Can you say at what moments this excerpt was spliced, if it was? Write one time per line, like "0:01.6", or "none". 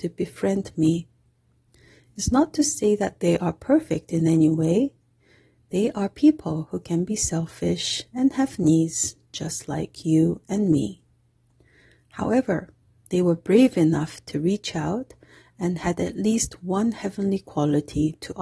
none